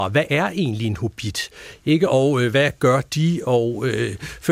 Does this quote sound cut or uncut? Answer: uncut